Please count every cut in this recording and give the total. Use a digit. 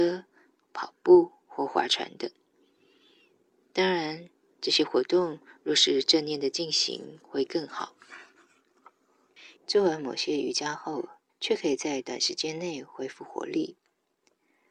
2